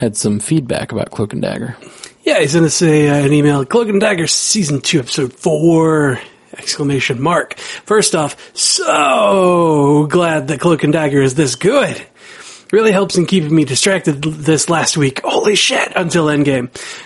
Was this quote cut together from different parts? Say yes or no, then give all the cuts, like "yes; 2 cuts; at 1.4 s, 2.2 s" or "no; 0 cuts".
no; 0 cuts